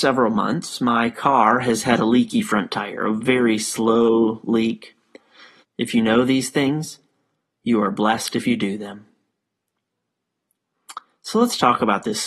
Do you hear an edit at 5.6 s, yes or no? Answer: yes